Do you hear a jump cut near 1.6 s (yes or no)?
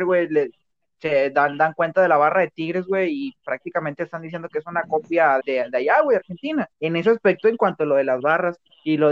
no